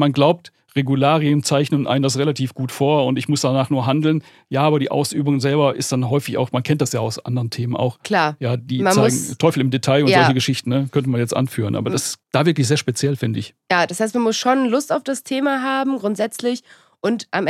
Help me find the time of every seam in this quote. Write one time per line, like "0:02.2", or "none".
0:12.2